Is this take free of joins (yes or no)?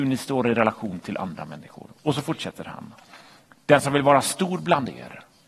yes